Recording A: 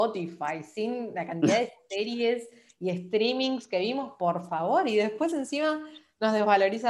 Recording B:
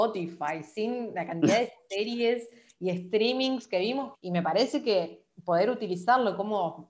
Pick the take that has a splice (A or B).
B